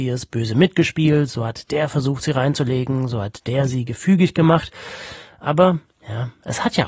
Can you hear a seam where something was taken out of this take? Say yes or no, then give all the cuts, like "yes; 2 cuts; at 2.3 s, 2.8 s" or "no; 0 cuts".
no; 0 cuts